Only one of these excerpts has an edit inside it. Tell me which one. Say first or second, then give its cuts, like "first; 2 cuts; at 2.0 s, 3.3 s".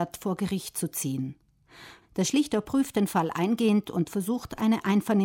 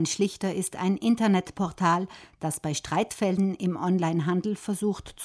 first; 1 cut; at 2.0 s